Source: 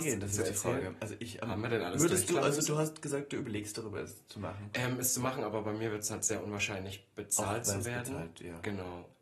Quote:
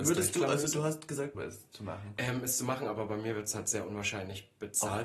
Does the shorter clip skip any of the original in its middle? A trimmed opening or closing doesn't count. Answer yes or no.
yes